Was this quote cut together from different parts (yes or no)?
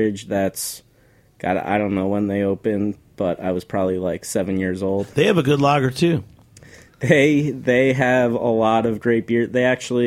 yes